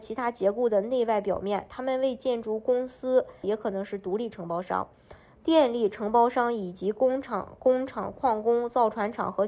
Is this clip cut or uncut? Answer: cut